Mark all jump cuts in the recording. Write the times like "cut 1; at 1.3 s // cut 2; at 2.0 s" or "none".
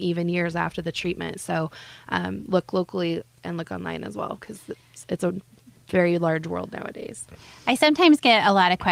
none